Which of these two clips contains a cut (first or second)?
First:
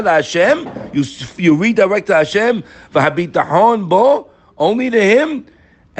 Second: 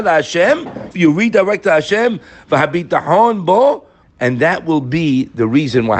second